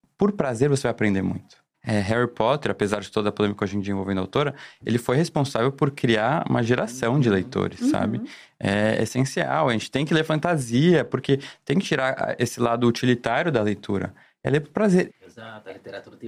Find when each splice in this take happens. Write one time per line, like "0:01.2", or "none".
0:01.7
0:15.1